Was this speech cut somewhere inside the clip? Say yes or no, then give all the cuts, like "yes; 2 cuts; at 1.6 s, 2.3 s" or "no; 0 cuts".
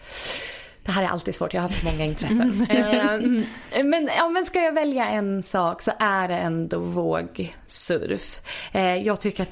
no; 0 cuts